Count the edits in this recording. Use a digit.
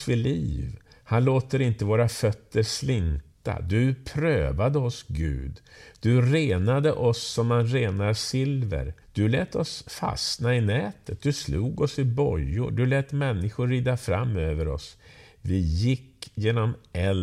1